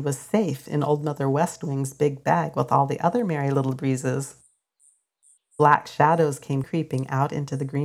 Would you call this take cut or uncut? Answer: cut